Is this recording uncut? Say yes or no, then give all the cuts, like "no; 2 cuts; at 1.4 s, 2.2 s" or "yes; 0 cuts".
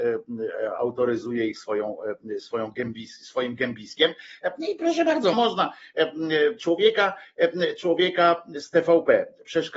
no; 2 cuts; at 5.3 s, 6.6 s